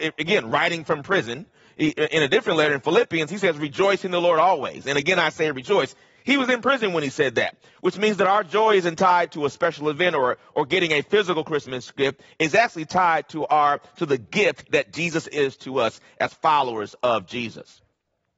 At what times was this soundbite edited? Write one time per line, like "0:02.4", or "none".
none